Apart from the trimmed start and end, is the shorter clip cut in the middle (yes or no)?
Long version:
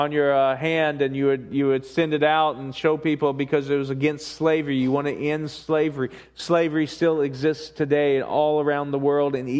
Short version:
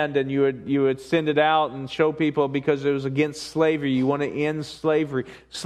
no